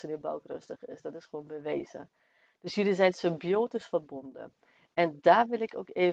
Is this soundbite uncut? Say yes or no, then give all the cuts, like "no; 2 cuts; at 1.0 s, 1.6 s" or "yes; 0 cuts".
yes; 0 cuts